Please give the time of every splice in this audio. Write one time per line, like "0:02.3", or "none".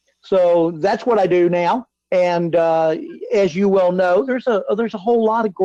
none